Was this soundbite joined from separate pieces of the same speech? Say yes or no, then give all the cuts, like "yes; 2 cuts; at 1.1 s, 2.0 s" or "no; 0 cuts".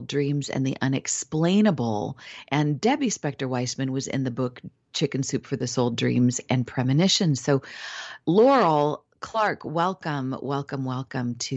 no; 0 cuts